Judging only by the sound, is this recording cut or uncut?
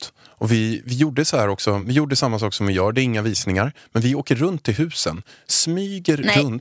uncut